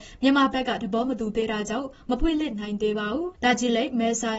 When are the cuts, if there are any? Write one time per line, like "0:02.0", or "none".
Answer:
0:03.3